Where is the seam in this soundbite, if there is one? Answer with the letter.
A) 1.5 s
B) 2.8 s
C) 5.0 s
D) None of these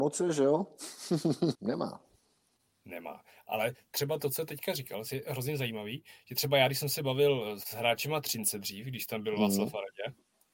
A